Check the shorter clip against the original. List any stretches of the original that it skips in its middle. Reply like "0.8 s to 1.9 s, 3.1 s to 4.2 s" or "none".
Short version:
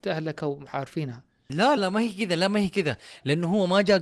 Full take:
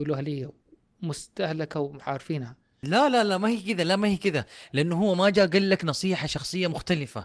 3.1 s to 3.3 s